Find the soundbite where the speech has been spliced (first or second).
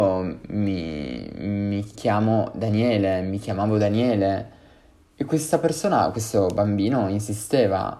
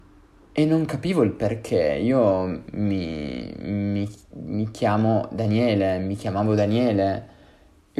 first